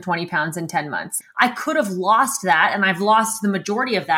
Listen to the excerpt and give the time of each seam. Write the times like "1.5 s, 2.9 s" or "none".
1.2 s